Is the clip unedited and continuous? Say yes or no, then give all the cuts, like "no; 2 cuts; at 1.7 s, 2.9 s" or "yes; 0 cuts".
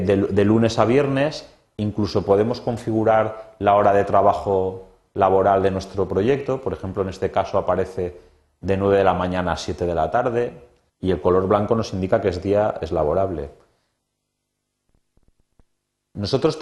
no; 2 cuts; at 1.7 s, 10.9 s